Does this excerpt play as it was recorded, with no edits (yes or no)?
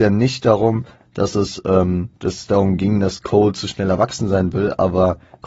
no